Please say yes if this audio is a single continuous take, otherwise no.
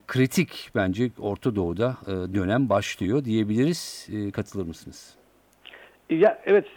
yes